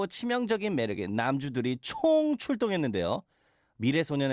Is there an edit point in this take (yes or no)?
no